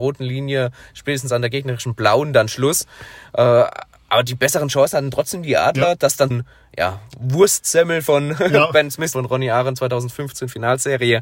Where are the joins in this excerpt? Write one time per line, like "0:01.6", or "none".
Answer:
0:06.3
0:09.1

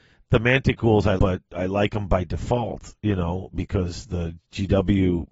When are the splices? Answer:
0:01.2

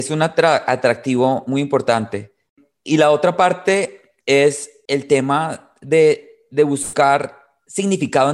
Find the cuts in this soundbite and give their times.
0:04.9

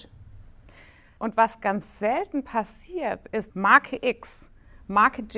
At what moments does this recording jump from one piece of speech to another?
0:01.2
0:03.5

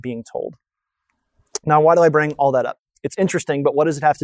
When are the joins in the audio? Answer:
none

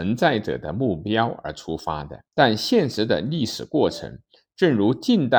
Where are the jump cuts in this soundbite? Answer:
0:02.3

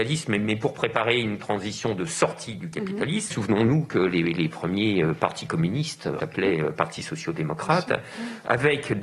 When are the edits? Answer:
0:03.3
0:06.2

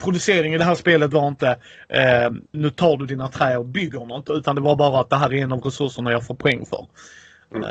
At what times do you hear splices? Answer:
0:02.5

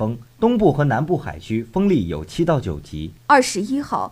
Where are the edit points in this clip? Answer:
0:03.2

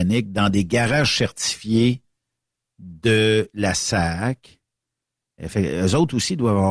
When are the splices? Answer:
none

